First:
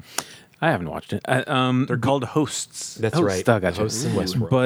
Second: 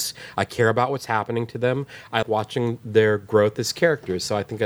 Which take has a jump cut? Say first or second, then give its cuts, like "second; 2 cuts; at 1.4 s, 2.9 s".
second; 1 cut; at 2.2 s